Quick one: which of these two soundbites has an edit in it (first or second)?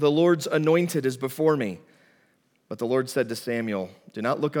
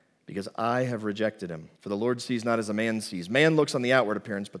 second